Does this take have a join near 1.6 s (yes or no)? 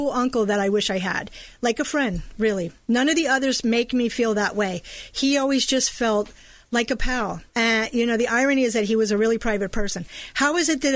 no